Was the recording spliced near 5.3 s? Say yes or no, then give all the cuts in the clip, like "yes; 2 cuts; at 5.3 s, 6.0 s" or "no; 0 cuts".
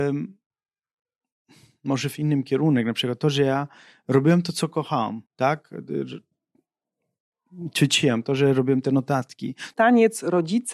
yes; 2 cuts; at 5.3 s, 9.7 s